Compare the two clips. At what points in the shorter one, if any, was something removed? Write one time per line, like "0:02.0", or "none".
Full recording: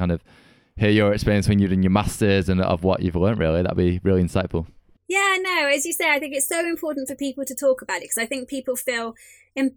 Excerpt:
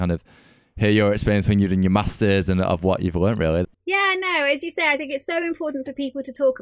0:03.6